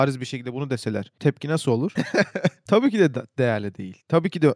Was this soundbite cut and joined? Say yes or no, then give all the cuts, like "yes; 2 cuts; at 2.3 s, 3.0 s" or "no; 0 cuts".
yes; 1 cut; at 2.0 s